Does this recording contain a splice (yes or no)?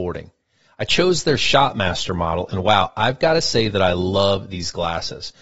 no